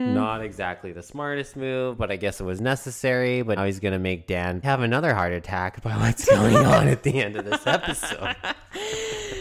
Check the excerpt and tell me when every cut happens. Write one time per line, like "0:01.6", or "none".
0:03.6
0:04.6